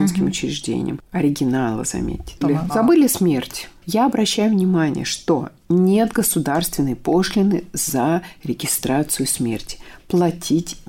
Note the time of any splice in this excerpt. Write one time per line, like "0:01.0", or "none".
0:02.4
0:03.8